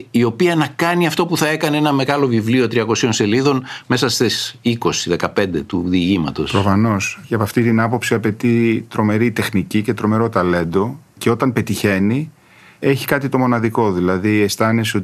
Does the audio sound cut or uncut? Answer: uncut